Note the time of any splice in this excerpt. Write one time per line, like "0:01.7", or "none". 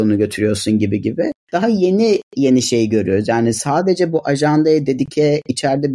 none